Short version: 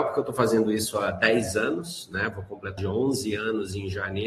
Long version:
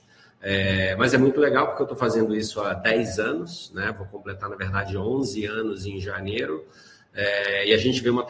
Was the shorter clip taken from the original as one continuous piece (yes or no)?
no